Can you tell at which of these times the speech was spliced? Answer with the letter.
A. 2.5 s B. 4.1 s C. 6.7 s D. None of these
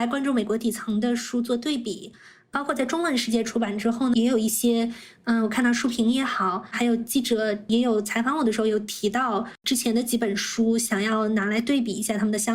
B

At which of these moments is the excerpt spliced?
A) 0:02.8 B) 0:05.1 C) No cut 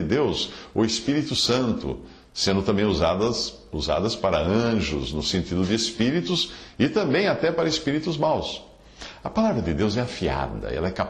C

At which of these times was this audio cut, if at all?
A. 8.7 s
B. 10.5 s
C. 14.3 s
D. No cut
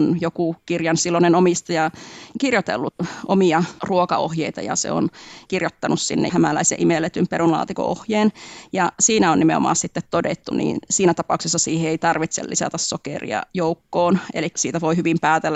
B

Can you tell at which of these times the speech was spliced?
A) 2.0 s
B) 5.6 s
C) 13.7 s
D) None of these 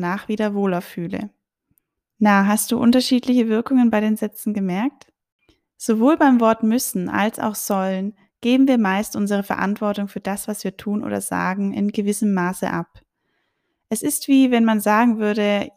A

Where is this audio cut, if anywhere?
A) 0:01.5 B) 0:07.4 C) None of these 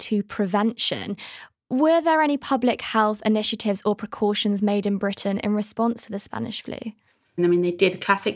B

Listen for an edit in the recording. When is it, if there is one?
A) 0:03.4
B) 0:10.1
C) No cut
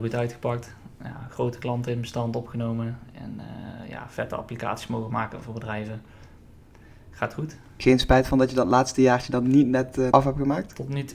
B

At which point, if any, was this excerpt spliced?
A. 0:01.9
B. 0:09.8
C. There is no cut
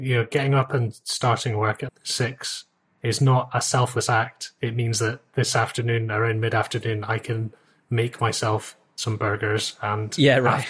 A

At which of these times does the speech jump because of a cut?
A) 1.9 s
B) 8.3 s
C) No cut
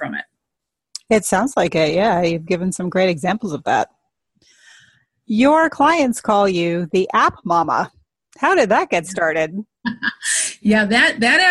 C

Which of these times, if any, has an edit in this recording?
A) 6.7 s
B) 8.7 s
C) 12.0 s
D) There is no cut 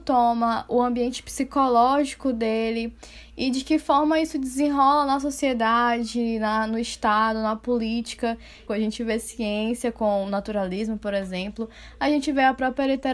B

